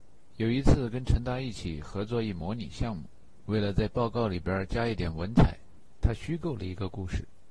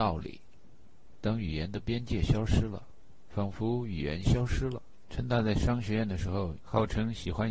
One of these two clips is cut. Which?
second; 2 cuts; at 5.1 s, 6.6 s

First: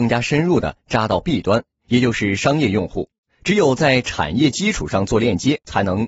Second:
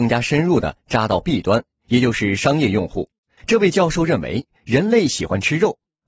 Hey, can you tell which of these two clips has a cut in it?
second; 1 cut; at 3.4 s

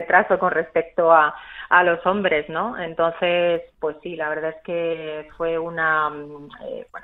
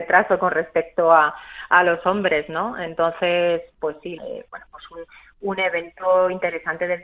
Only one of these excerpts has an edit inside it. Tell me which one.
second; 1 cut; at 4.2 s

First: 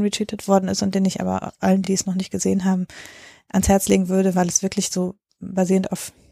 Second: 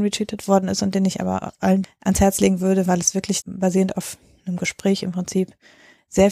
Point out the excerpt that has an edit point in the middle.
second; 2 cuts; at 1.8 s, 3.4 s

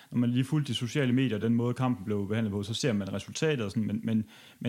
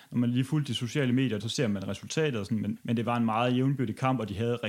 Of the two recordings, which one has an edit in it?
second; 2 cuts; at 1.4 s, 2.8 s

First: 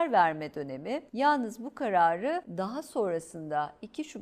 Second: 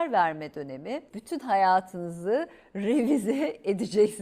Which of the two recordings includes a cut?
second; 1 cut; at 1.1 s

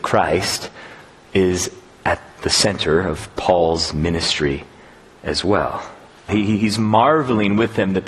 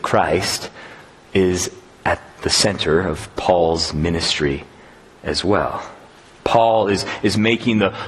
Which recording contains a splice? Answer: first; 1 cut; at 6.3 s

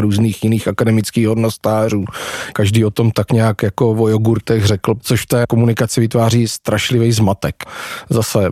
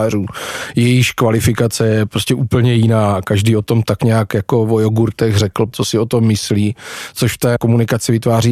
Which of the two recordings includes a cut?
first; 2 cuts; at 2.5 s, 5.0 s

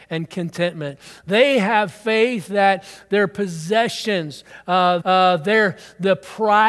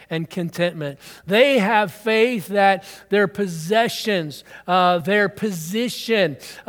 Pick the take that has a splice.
first; 1 cut; at 5.0 s

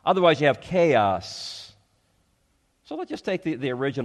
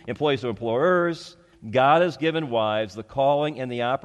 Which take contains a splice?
second; 1 cut; at 1.5 s

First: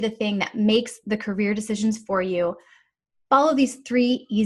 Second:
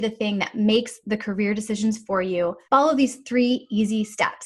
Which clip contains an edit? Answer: second; 1 cut; at 2.6 s

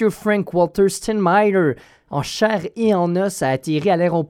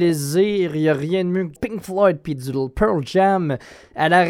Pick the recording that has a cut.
second; 1 cut; at 1.6 s

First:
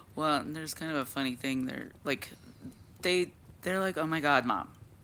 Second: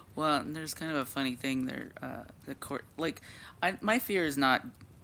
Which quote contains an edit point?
first; 1 cut; at 1.9 s

